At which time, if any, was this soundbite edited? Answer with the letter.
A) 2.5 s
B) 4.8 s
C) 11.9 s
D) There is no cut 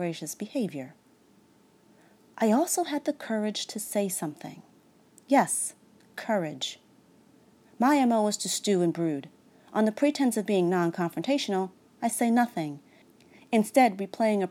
D